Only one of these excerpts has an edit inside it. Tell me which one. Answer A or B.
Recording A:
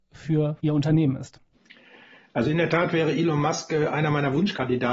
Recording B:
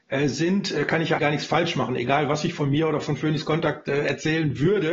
B